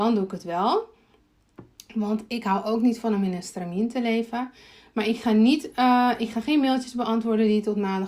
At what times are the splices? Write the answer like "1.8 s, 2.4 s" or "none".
none